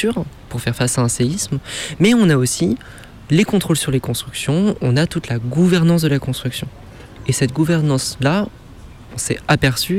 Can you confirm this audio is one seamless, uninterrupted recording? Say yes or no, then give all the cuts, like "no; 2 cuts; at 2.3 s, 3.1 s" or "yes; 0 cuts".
yes; 0 cuts